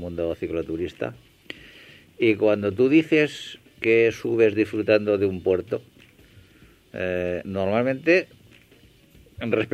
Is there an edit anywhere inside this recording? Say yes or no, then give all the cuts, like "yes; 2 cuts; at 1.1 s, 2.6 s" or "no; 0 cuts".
no; 0 cuts